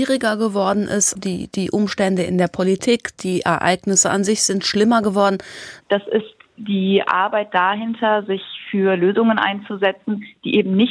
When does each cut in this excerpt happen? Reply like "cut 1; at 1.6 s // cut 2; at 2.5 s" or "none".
cut 1; at 1.1 s // cut 2; at 5.8 s